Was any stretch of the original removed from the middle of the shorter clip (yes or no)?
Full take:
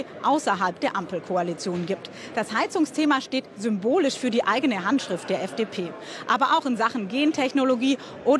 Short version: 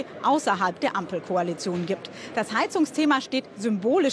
no